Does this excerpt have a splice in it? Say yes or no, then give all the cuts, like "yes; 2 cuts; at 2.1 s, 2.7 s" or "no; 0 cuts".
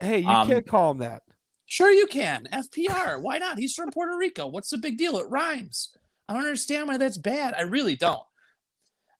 no; 0 cuts